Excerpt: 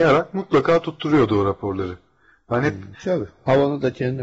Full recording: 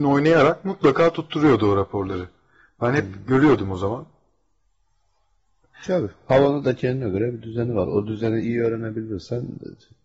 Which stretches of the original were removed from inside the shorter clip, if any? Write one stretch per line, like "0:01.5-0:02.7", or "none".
0:03.2-0:05.8